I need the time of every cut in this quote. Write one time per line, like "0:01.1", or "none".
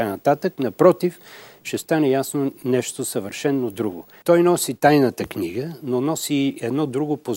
0:04.2